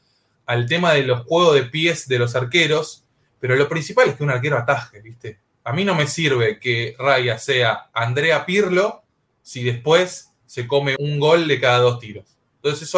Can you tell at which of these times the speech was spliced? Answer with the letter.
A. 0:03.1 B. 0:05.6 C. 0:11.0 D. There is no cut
C